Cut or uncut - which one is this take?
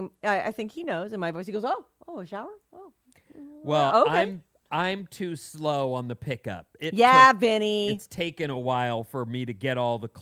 uncut